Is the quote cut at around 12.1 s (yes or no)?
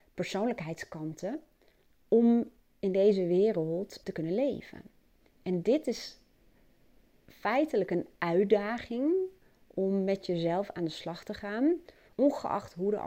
yes